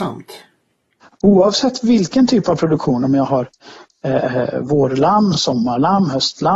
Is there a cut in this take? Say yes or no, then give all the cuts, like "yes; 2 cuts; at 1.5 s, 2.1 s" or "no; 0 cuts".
no; 0 cuts